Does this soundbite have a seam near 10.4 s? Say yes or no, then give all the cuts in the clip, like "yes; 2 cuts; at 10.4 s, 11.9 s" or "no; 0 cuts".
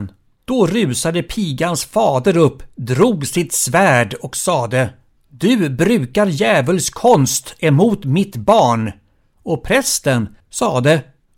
yes; 1 cut; at 10.4 s